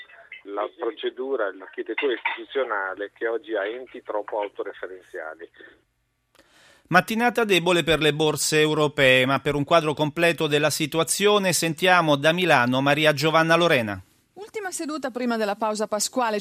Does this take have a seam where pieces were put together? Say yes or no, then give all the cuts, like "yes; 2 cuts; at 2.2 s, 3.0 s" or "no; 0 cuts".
no; 0 cuts